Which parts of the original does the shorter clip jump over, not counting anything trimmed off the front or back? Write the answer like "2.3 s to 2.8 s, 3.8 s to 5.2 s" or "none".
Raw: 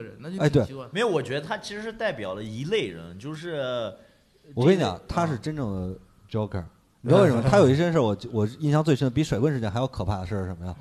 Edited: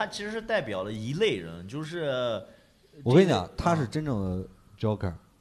none